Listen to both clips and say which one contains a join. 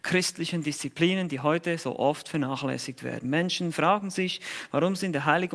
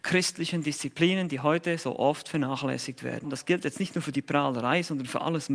second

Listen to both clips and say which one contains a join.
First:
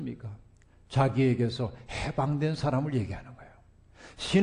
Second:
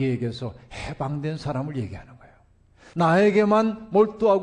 second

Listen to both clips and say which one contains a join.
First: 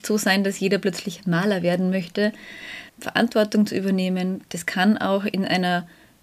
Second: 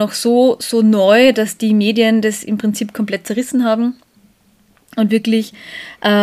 first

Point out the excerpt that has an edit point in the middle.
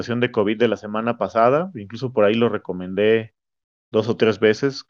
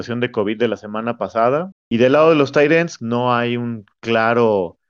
second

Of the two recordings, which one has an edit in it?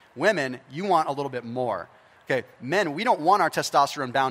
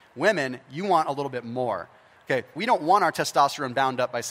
second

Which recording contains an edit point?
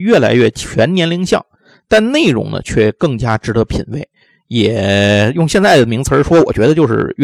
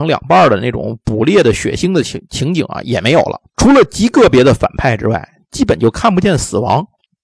second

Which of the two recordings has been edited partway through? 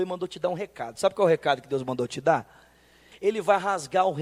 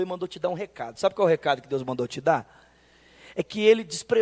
first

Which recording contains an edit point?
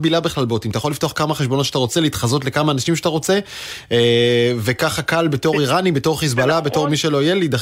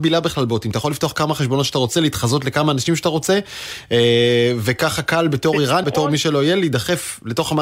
second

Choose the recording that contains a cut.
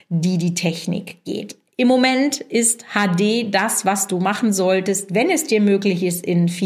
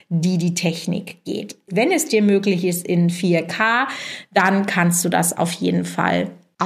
second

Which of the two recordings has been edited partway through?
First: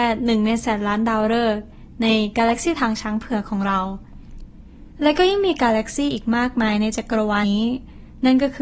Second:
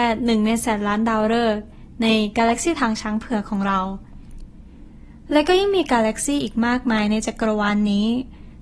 first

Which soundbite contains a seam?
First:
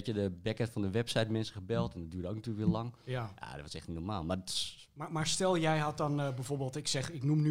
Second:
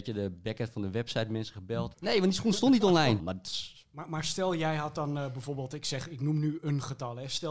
second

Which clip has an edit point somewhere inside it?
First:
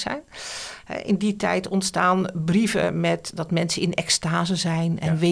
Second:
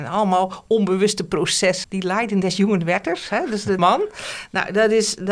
second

